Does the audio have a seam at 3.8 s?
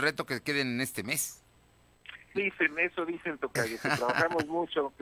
no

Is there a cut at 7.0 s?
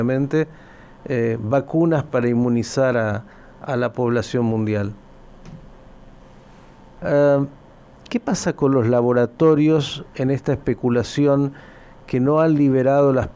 yes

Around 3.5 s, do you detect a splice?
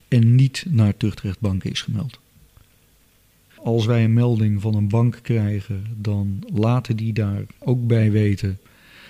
yes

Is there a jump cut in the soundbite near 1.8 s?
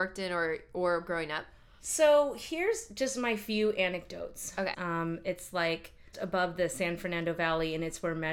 no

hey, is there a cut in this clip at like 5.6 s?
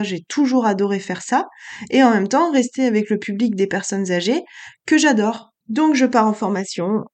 yes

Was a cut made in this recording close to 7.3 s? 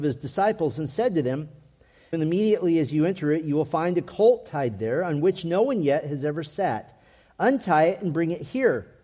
no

